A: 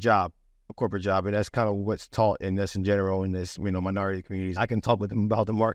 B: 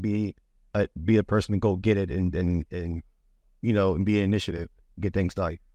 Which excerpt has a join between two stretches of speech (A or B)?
A